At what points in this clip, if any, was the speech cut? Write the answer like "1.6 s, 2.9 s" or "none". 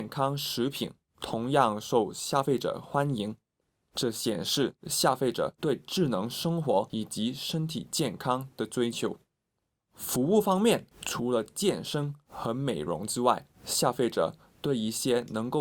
10.9 s, 13.5 s

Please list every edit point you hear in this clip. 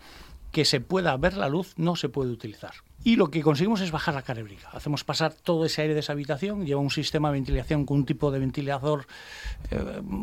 3.0 s

